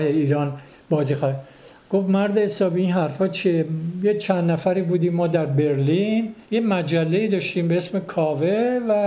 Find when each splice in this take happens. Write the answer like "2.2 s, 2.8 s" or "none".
6.5 s